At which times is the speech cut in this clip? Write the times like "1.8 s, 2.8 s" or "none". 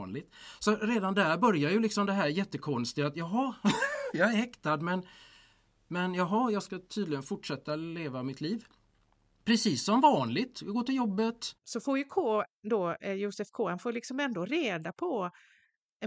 11.5 s